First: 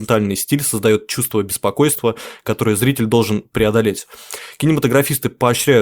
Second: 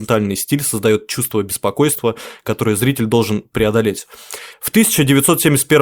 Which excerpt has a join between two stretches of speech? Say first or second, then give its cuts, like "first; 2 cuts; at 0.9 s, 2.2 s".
second; 1 cut; at 4.5 s